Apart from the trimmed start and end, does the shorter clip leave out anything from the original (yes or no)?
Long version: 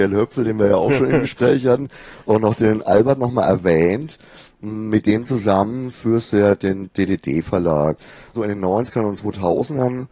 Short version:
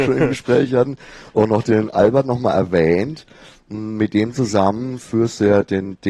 no